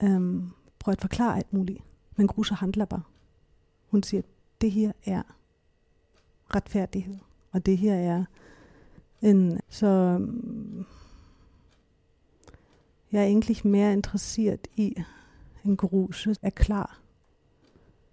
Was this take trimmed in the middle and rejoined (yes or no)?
yes